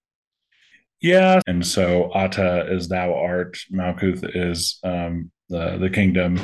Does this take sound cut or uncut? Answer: cut